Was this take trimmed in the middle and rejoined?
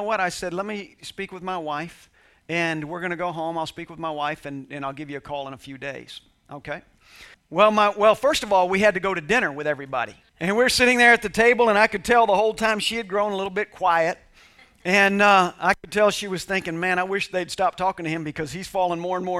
yes; 2 cuts; at 7.3 s, 10.3 s

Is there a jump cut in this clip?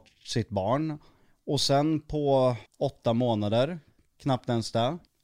yes; 1 cut; at 2.7 s

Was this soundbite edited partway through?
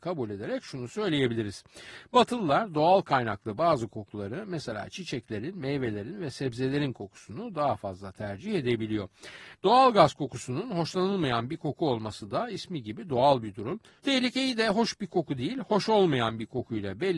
yes; 2 cuts; at 9.6 s, 14.0 s

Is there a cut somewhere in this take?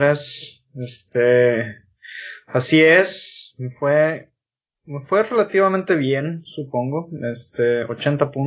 no; 0 cuts

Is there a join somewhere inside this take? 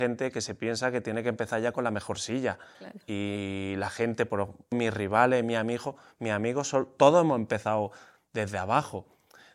yes; 1 cut; at 4.7 s

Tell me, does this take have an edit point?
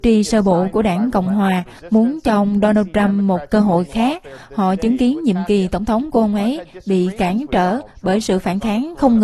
no; 0 cuts

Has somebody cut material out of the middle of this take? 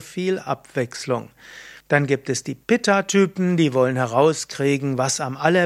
yes; 1 cut; at 1.8 s

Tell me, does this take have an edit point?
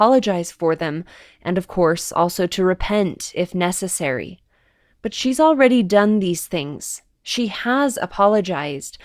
no; 0 cuts

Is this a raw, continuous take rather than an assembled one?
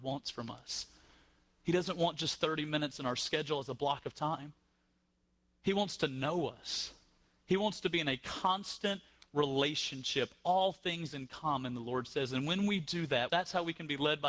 no; 1 cut; at 13.3 s

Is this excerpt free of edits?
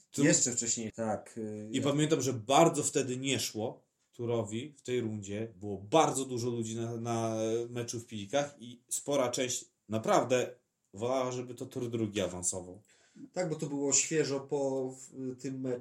no; 1 cut; at 0.9 s

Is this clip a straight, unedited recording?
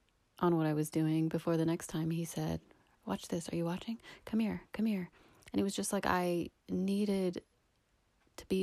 no; 1 cut; at 2.9 s

